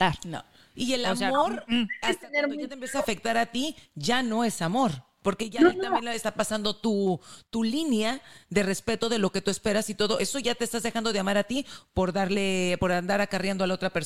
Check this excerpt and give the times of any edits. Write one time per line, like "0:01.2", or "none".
none